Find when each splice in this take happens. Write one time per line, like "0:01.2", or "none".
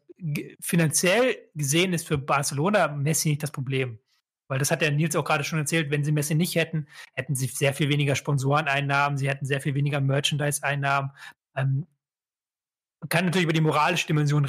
0:11.3

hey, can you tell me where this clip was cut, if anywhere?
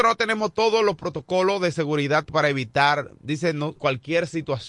0:03.8

